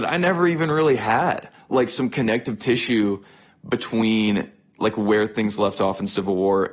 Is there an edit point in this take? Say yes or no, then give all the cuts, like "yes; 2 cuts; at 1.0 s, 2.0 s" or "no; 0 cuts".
no; 0 cuts